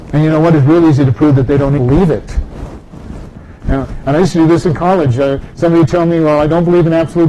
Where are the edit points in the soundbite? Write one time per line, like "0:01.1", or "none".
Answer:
0:01.8